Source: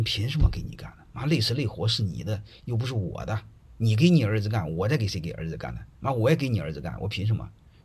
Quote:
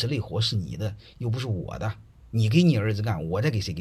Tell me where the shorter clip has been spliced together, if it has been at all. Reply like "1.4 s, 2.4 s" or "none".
none